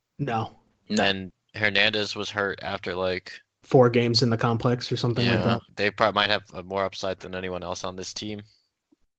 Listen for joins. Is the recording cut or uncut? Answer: cut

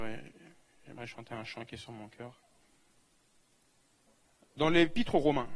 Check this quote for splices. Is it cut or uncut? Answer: uncut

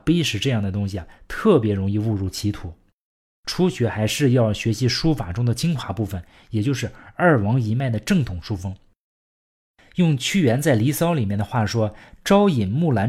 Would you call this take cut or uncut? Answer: uncut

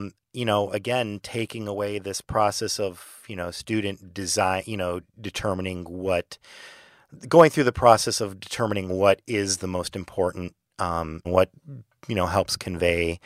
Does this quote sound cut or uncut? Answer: cut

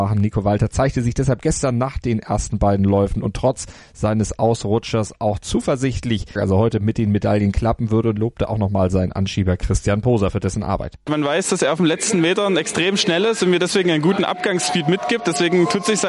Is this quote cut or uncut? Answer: cut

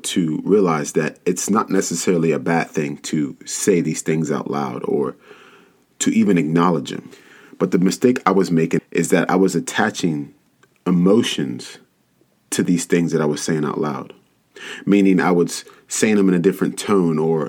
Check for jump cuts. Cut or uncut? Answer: cut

